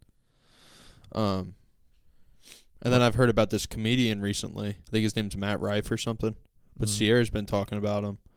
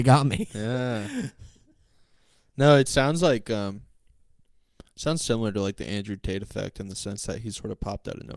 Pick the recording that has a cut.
first; 1 cut; at 4.8 s

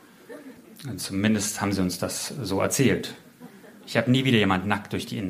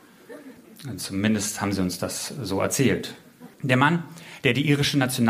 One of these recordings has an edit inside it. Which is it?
second; 1 cut; at 3.5 s

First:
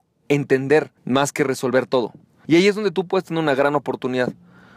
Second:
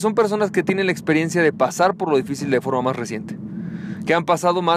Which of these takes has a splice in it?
first; 2 cuts; at 1.0 s, 2.4 s

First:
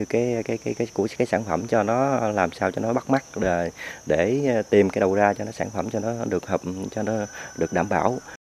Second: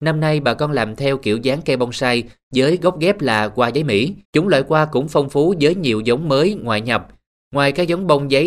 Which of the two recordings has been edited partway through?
second; 1 cut; at 4.3 s

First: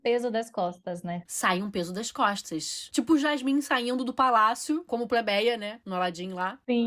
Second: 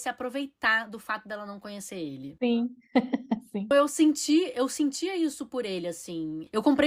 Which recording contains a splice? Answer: second; 2 cuts; at 2.4 s, 3.7 s

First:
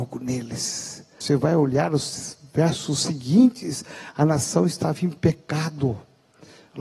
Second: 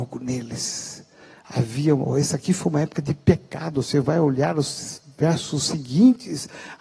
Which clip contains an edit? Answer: first; 1 cut; at 1.2 s

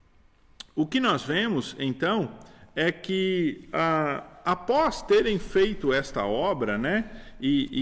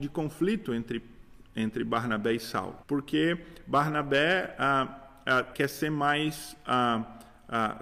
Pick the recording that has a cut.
second; 2 cuts; at 2.8 s, 5.5 s

